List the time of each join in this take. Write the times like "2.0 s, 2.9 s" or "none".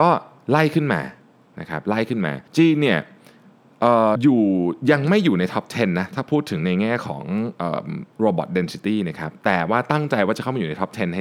2.5 s, 4.1 s